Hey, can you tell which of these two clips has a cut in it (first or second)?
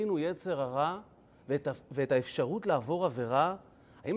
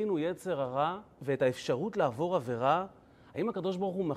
second